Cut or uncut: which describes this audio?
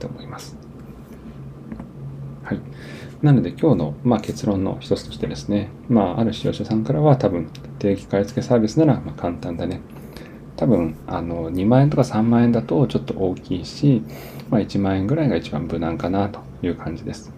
cut